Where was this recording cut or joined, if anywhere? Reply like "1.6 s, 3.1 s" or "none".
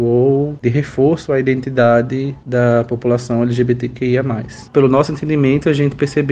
4.7 s